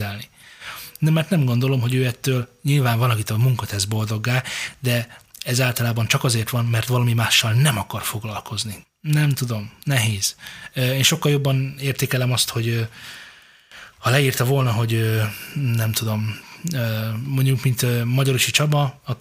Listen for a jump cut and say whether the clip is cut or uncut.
cut